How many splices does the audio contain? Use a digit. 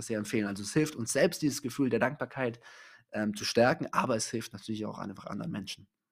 0